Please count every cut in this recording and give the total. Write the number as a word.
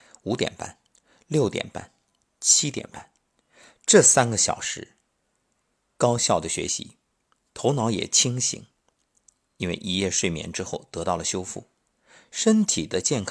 zero